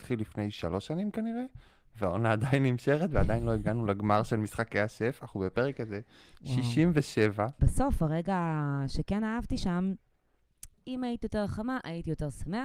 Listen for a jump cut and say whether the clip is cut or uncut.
cut